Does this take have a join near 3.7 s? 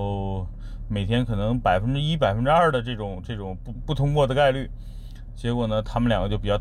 yes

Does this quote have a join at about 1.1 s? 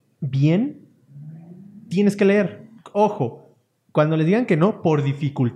no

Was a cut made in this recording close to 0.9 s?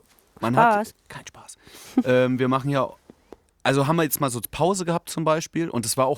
yes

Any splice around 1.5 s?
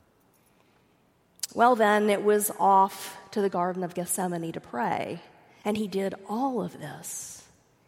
no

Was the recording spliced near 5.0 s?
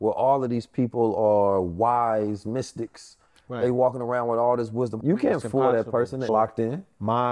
yes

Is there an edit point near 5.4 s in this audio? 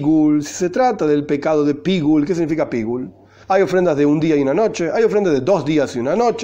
no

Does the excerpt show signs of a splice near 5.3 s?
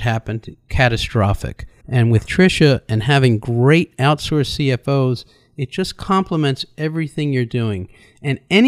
no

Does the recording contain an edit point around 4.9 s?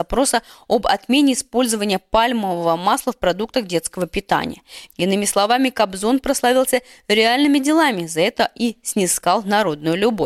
yes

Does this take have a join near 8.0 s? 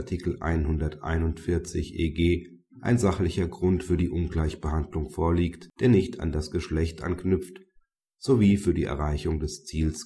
yes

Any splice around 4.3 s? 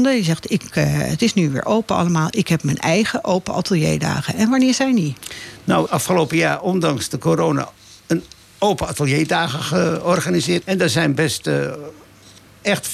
no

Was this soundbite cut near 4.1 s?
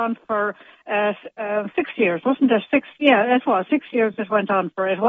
no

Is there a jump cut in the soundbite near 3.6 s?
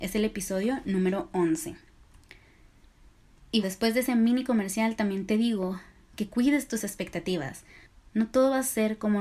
yes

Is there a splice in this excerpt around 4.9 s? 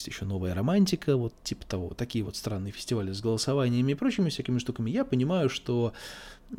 no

